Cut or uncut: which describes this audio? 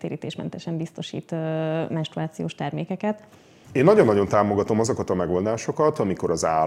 cut